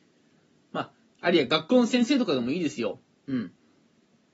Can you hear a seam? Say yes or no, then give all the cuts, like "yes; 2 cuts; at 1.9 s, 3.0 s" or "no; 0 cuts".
yes; 1 cut; at 1.1 s